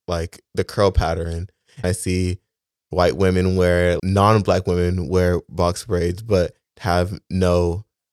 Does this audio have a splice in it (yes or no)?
yes